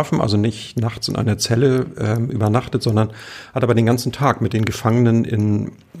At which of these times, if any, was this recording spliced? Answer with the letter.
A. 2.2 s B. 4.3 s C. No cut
C